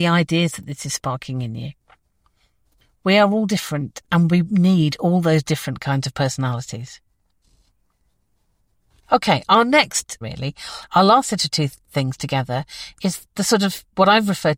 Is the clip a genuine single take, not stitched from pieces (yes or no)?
no